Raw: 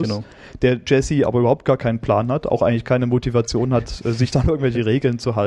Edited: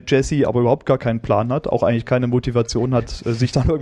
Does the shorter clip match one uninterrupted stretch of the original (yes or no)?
yes